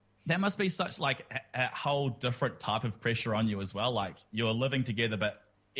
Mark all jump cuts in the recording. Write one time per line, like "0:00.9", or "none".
none